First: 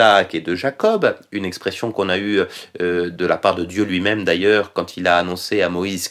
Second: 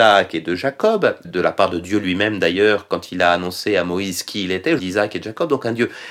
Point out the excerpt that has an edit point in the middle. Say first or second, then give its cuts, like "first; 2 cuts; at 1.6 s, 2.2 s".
second; 2 cuts; at 1.2 s, 4.8 s